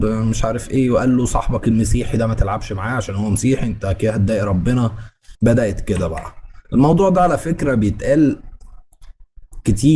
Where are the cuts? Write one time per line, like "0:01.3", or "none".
0:05.3